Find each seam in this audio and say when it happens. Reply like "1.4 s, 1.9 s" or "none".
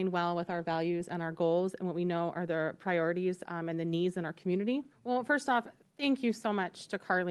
4.9 s